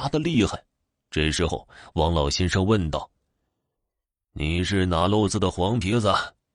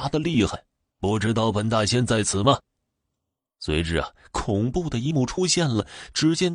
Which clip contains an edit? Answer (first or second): second